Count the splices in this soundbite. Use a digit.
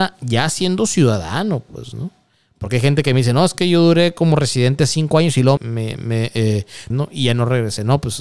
2